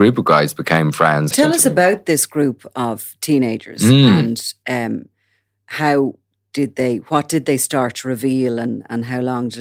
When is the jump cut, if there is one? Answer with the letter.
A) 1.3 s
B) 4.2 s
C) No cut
A